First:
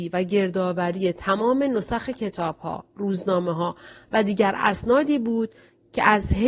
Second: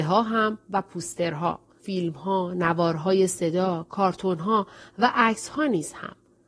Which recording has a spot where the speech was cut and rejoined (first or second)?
second